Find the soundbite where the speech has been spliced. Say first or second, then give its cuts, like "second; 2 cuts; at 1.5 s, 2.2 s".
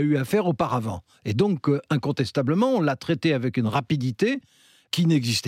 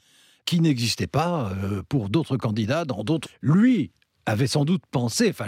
second; 1 cut; at 3.2 s